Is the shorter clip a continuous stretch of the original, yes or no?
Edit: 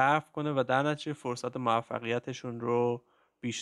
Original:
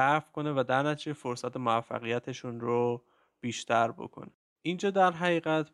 yes